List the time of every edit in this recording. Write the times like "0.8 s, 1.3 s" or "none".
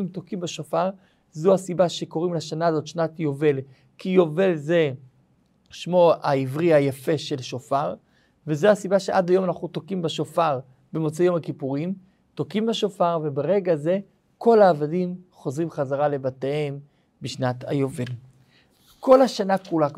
none